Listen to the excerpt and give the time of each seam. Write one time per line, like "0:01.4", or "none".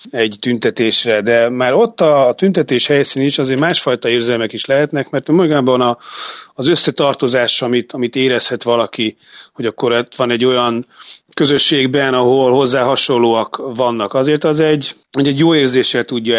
0:15.0